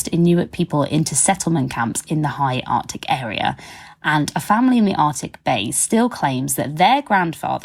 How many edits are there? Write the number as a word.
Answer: zero